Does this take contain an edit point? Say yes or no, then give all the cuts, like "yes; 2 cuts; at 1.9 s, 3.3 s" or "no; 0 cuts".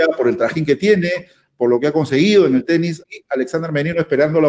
yes; 1 cut; at 3.0 s